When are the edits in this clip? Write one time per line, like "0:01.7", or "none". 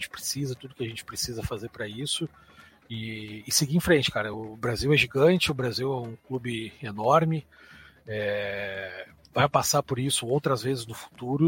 none